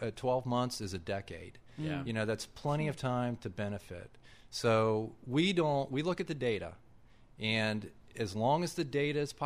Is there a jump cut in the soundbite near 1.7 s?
no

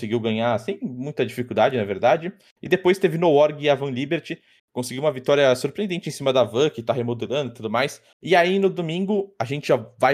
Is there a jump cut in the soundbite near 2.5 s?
no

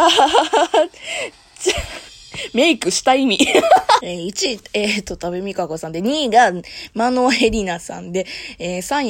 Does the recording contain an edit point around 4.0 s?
yes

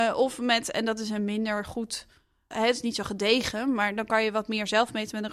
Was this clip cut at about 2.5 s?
yes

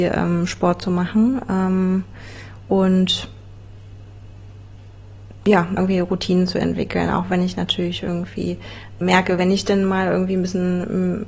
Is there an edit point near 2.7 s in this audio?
no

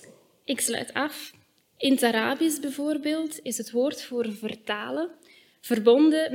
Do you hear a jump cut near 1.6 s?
yes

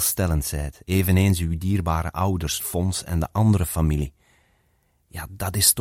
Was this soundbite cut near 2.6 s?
yes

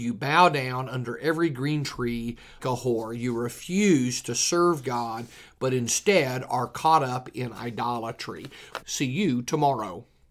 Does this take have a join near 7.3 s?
no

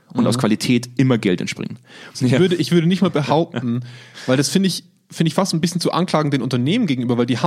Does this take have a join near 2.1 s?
yes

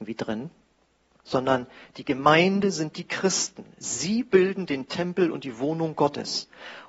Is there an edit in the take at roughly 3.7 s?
no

